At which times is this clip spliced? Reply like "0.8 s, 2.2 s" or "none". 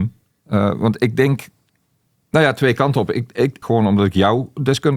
3.6 s